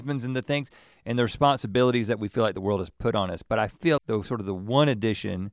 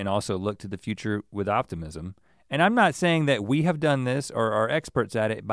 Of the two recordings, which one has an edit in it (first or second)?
first